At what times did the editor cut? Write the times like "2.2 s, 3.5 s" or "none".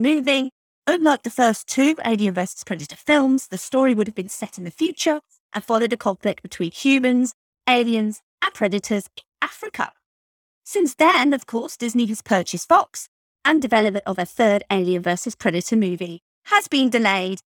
none